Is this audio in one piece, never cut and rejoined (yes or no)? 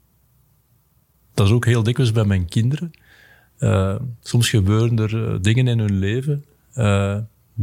yes